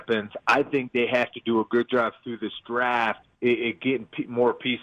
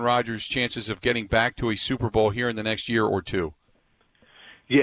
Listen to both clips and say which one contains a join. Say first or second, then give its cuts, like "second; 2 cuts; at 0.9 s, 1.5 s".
first; 1 cut; at 3.3 s